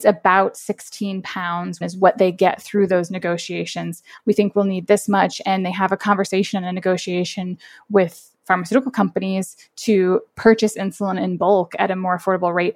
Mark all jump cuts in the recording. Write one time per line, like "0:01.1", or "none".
0:01.8
0:04.2